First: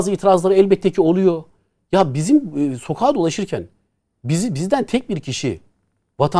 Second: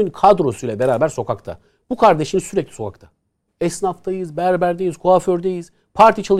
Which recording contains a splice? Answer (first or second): second